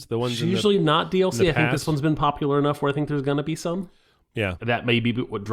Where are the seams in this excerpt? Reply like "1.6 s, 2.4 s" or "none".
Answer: 4.6 s